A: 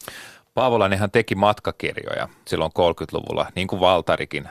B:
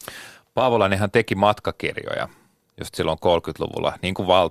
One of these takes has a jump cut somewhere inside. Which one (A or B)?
A